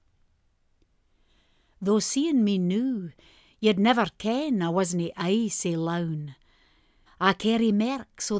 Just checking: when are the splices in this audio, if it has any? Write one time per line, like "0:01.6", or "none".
0:07.1